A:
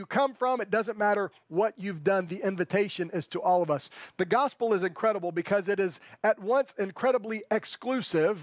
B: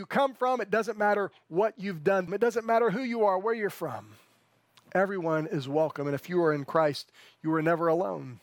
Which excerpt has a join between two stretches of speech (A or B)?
B